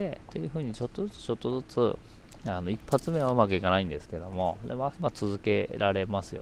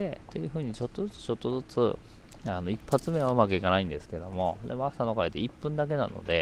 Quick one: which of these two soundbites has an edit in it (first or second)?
first